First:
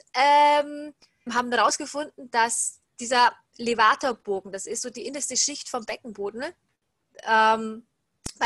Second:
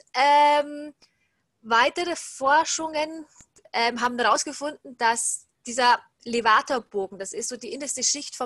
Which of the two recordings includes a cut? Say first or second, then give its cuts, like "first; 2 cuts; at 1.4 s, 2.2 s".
first; 1 cut; at 1.3 s